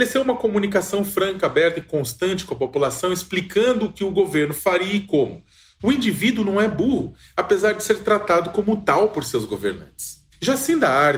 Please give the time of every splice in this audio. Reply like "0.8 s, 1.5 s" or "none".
5.8 s